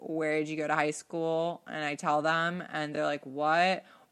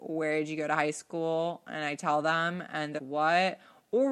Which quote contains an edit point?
second; 1 cut; at 3.0 s

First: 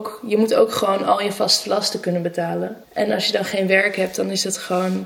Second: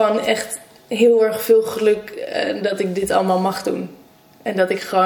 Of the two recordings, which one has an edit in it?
first; 1 cut; at 2.8 s

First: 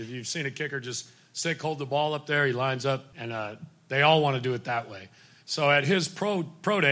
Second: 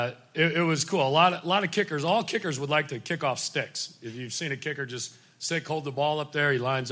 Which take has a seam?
first; 1 cut; at 3.1 s

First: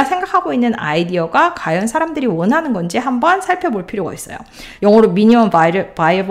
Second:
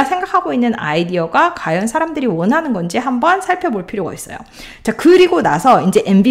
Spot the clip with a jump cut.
first; 1 cut; at 4.8 s

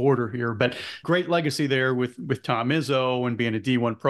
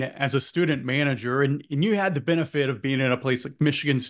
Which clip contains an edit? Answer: first; 1 cut; at 1.0 s

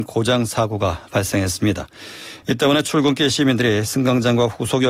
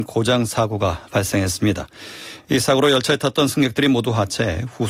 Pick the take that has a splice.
first; 1 cut; at 2.4 s

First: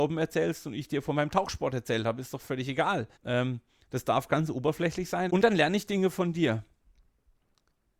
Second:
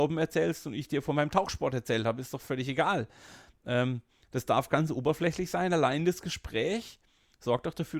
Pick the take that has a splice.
first; 2 cuts; at 3.1 s, 5.3 s

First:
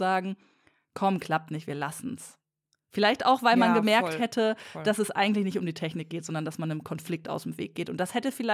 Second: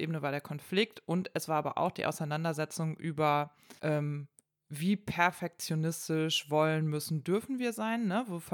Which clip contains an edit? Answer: second; 1 cut; at 3.8 s

